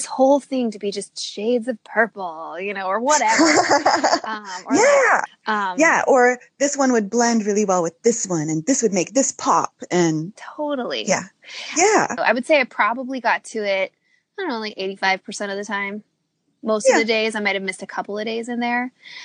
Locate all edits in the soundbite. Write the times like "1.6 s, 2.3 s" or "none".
5.3 s, 12.2 s